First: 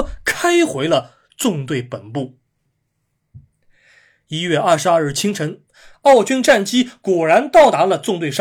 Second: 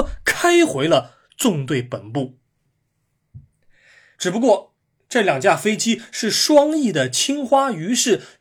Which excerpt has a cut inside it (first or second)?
second